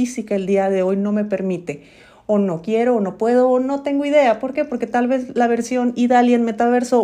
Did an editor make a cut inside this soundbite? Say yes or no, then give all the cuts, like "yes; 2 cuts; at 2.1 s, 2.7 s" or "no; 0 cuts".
no; 0 cuts